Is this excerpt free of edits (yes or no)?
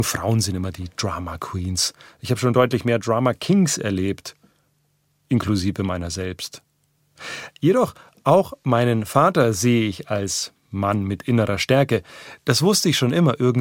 yes